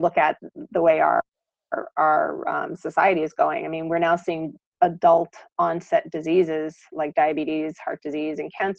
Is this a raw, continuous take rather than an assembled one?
yes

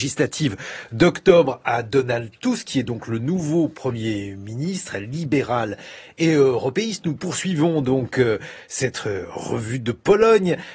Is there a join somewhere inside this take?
no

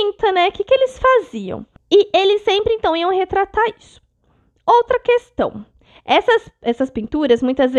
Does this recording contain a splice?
yes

